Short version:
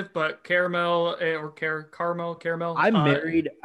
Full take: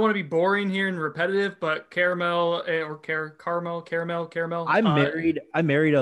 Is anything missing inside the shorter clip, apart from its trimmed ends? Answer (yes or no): yes